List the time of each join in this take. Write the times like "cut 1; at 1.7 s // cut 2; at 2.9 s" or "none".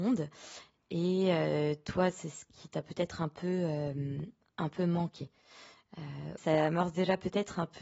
cut 1; at 6.4 s